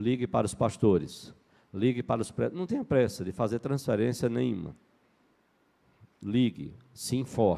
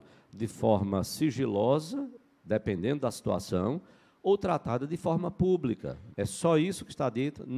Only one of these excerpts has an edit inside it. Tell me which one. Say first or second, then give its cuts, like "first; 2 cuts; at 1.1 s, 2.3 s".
second; 1 cut; at 6.1 s